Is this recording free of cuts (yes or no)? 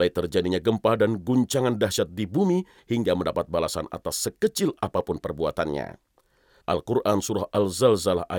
no